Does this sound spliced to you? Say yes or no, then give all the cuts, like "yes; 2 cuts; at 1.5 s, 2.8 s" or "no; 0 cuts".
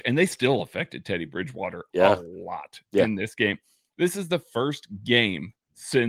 no; 0 cuts